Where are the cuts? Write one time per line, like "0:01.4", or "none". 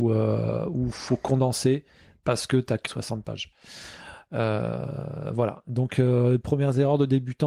0:02.9